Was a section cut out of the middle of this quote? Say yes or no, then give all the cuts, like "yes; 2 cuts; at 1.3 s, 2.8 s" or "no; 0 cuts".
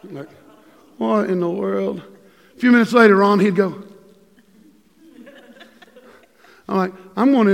no; 0 cuts